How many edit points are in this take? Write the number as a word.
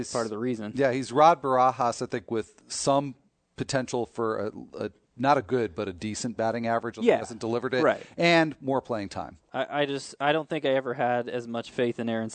one